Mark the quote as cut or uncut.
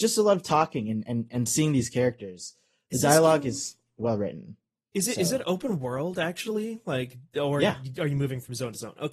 uncut